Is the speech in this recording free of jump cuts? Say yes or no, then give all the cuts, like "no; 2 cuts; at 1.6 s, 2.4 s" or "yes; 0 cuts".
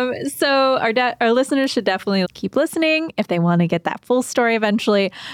no; 1 cut; at 2.2 s